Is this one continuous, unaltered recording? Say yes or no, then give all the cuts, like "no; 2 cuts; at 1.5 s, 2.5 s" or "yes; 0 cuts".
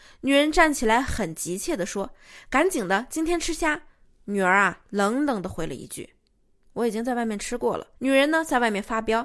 no; 1 cut; at 8.0 s